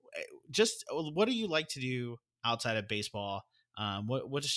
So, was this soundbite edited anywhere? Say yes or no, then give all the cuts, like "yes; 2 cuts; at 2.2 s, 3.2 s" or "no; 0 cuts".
no; 0 cuts